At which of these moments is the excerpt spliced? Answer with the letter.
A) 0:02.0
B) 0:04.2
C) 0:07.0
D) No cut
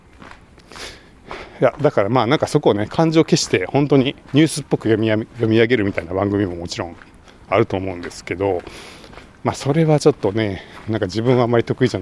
B